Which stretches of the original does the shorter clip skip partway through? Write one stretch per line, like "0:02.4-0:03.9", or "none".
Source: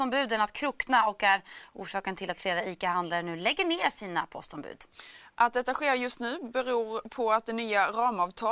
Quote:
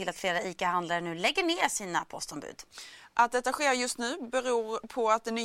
none